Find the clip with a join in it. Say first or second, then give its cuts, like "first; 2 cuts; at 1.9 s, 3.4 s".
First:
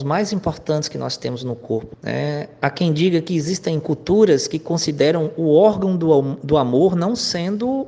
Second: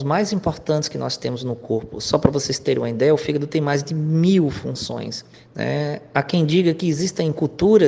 first; 1 cut; at 1.9 s